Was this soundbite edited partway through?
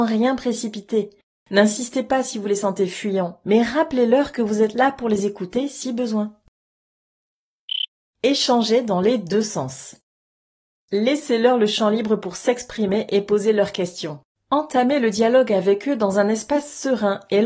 yes; 1 cut; at 14.3 s

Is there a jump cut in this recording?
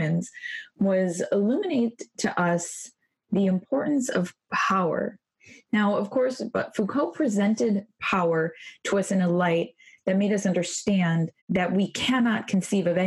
yes; 2 cuts; at 6.5 s, 11.4 s

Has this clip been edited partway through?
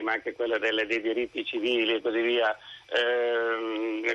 no; 0 cuts

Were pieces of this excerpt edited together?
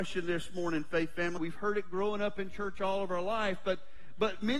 yes; 1 cut; at 1.4 s

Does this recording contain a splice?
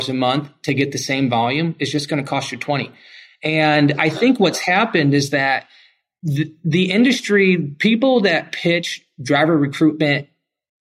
no; 0 cuts

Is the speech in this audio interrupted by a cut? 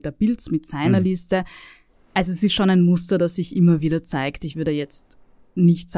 no; 0 cuts

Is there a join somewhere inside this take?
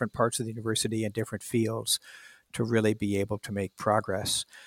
no; 0 cuts

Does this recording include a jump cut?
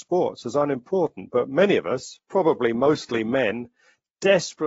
no; 0 cuts

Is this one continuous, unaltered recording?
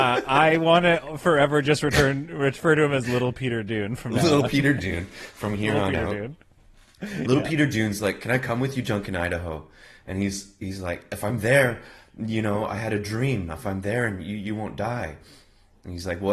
yes; 0 cuts

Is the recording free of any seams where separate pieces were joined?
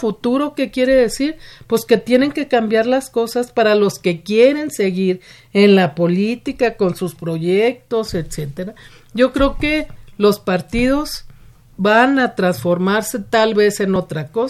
yes; 0 cuts

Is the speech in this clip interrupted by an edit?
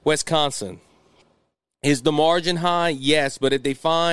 no; 0 cuts

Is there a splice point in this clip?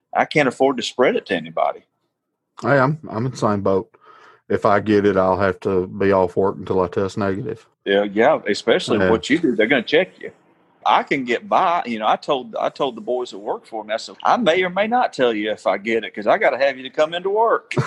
yes; 2 cuts; at 7.7 s, 14.1 s

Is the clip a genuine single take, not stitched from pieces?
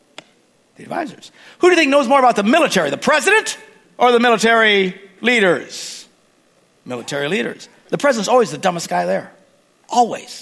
yes; 0 cuts

